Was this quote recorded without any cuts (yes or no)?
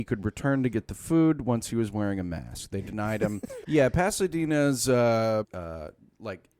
no